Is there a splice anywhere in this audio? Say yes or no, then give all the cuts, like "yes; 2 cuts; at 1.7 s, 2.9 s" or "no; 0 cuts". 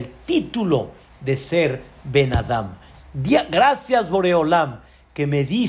yes; 1 cut; at 3.0 s